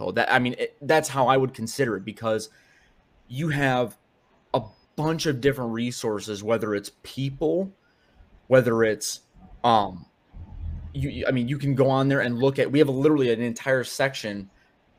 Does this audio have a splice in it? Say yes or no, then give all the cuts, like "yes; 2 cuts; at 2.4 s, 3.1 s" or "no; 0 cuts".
no; 0 cuts